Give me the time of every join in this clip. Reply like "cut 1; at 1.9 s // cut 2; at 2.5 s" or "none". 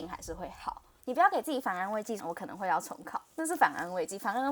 cut 1; at 1.0 s // cut 2; at 2.2 s